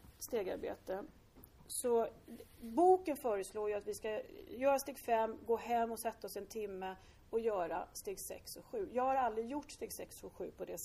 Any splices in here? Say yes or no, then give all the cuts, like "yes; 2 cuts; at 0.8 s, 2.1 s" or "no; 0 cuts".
no; 0 cuts